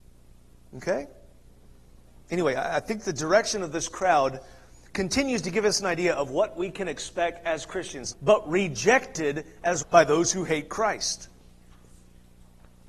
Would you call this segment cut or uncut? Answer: cut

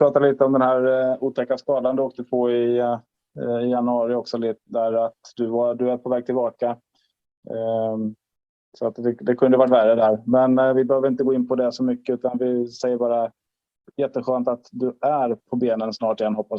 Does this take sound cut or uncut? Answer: uncut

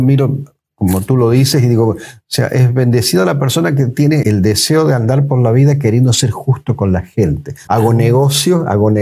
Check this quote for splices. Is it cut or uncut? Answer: cut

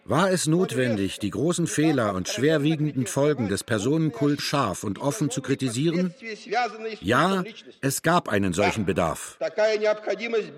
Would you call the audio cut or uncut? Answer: cut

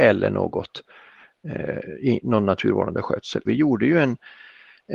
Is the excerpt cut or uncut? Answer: cut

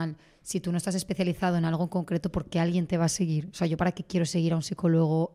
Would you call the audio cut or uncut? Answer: uncut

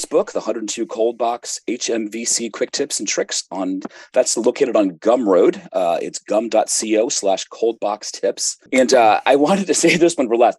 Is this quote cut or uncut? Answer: cut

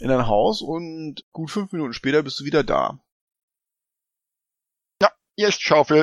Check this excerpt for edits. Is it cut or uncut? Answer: uncut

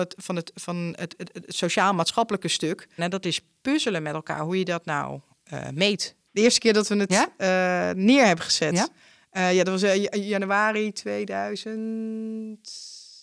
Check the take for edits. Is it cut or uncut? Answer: cut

